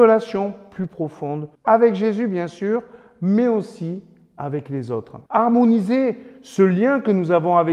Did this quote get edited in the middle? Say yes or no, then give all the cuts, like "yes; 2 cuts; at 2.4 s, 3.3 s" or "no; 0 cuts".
yes; 2 cuts; at 1.5 s, 5.3 s